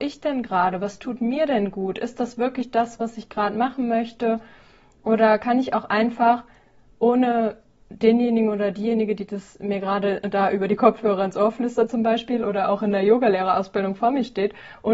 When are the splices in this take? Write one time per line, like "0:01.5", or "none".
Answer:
none